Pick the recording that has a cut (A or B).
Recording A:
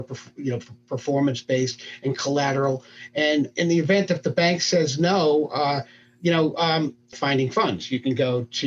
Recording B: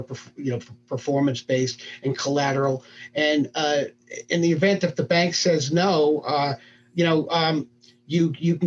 A